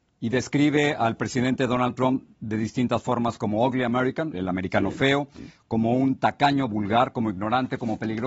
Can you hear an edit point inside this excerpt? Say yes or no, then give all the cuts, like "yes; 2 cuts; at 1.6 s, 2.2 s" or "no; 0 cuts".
yes; 1 cut; at 4.3 s